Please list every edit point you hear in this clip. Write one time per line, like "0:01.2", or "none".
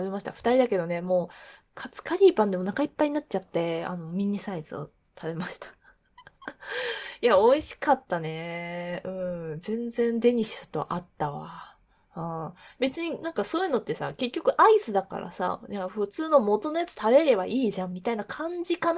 none